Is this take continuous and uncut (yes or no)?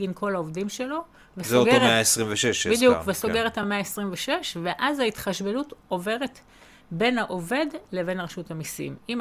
yes